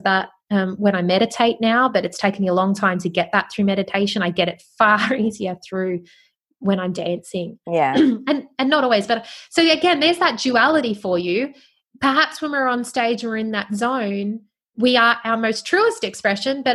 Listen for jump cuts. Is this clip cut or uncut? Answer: uncut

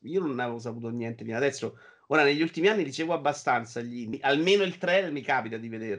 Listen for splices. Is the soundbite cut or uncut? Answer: cut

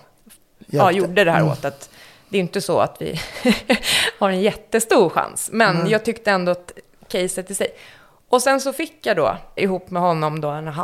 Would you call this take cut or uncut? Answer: cut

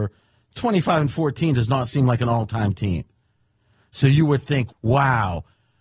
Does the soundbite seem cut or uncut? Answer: cut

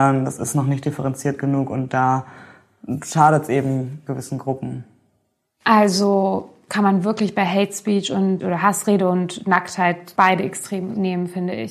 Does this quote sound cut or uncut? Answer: uncut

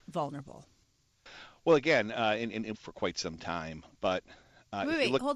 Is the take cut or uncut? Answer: cut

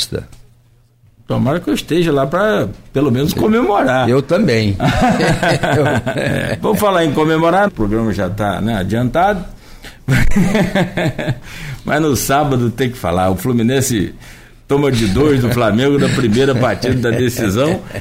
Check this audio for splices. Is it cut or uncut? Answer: cut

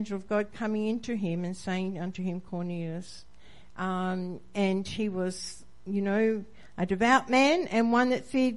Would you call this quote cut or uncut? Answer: cut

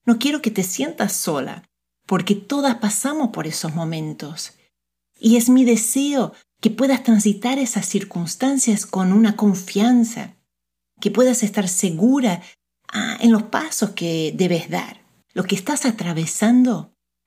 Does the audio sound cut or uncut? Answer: cut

